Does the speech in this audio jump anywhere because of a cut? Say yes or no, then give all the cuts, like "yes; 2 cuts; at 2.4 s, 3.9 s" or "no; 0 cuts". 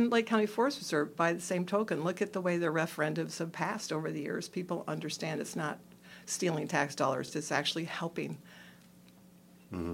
no; 0 cuts